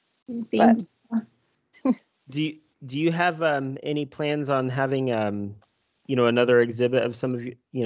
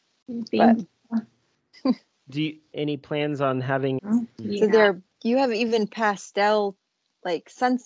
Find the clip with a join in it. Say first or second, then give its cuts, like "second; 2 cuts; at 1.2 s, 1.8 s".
second; 2 cuts; at 2.7 s, 4.0 s